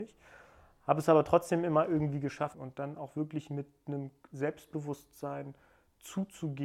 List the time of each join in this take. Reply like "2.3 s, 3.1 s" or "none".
2.5 s